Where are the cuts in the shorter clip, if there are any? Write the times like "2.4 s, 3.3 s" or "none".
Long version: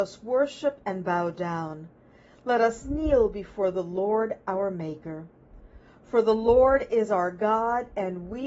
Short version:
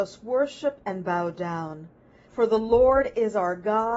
2.2 s